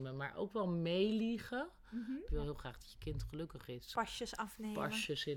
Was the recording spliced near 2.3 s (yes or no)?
yes